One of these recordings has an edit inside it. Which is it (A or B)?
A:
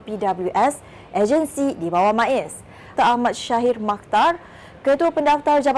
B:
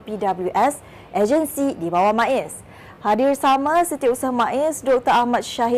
A